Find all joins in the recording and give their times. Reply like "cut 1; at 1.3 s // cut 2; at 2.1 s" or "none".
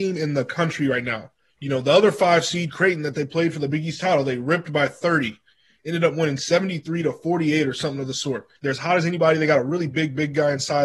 cut 1; at 8.6 s // cut 2; at 9.9 s